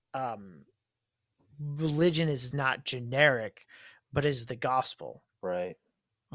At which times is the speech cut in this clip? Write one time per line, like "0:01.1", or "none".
0:02.5